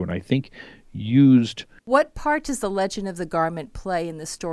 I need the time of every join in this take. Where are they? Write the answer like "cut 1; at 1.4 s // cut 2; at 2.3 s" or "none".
cut 1; at 1.8 s